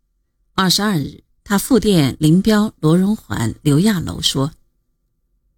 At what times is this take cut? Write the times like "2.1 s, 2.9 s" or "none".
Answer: none